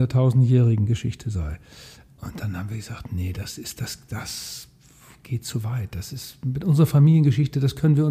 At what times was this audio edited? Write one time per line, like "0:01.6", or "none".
none